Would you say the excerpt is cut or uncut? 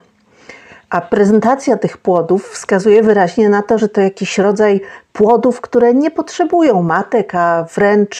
uncut